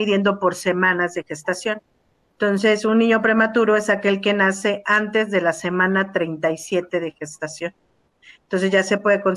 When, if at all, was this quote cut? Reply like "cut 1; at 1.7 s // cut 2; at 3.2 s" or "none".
none